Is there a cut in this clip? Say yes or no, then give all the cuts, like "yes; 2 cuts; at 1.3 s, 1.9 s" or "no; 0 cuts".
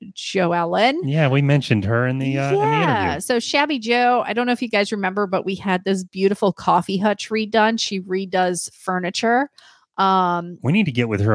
no; 0 cuts